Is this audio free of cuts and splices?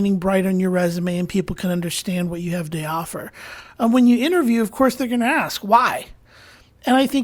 yes; 0 cuts

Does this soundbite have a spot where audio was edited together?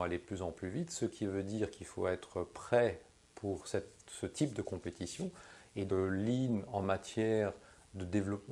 yes; 1 cut; at 5.9 s

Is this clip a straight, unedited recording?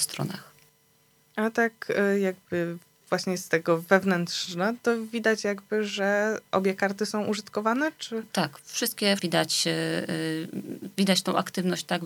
no; 1 cut; at 9.2 s

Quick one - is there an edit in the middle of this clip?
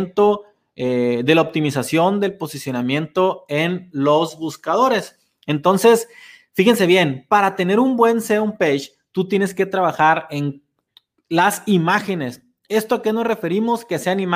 no; 0 cuts

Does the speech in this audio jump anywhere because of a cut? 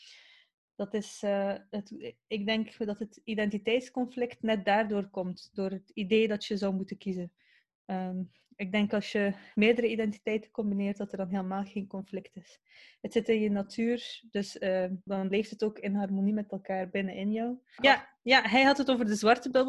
yes; 2 cuts; at 15.1 s, 17.8 s

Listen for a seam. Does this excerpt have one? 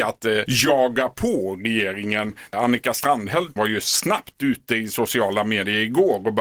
yes; 1 cut; at 3.6 s

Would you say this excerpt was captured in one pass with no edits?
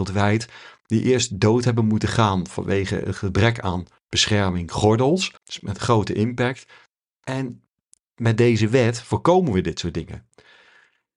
no; 1 cut; at 5.4 s

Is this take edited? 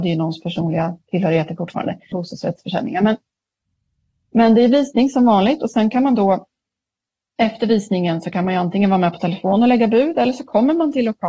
yes; 1 cut; at 2.1 s

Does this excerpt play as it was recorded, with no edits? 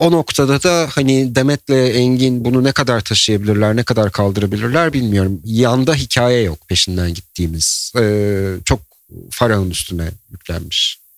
yes; 0 cuts

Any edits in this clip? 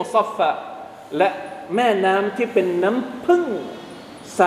no; 0 cuts

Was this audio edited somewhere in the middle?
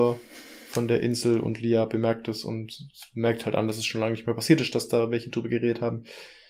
no; 0 cuts

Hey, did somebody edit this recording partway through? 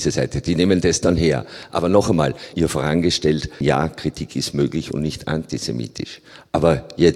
yes; 2 cuts; at 2.5 s, 3.6 s

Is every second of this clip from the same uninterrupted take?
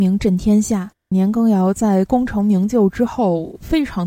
no; 1 cut; at 1.1 s

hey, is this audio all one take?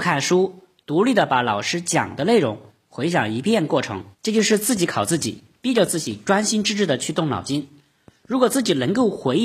no; 1 cut; at 4.1 s

